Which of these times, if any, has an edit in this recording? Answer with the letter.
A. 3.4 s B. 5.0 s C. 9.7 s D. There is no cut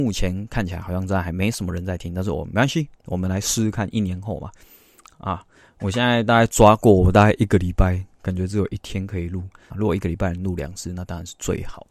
C